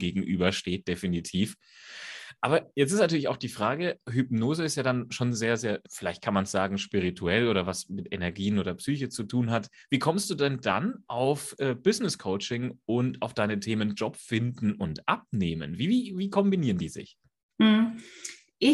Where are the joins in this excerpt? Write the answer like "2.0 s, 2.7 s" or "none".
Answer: 5.9 s